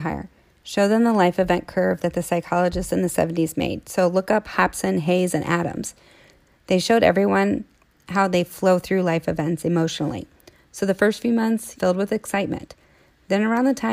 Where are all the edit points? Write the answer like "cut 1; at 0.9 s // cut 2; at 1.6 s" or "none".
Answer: cut 1; at 11.7 s

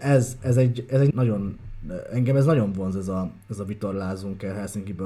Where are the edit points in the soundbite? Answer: cut 1; at 1.1 s

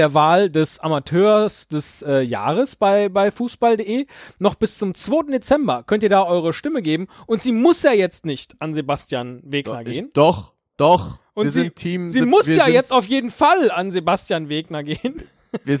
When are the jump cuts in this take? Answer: none

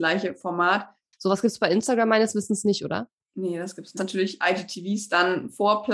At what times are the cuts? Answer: cut 1; at 1.1 s // cut 2; at 4.0 s

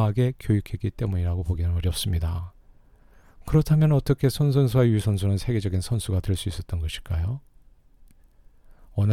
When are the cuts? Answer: none

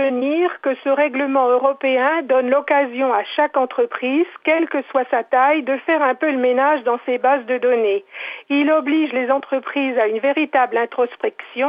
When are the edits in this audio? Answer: none

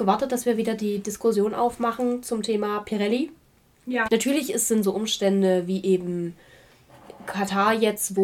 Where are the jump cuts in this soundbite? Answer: cut 1; at 4.1 s

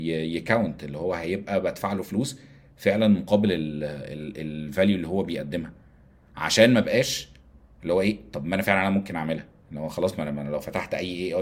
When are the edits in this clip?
cut 1; at 9.6 s

